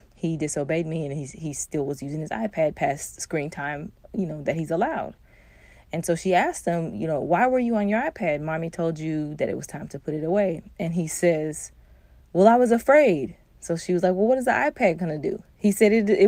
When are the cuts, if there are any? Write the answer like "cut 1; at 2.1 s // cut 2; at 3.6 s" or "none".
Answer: none